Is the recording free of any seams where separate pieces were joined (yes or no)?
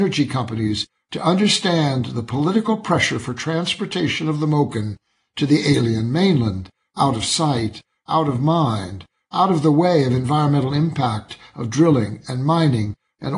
yes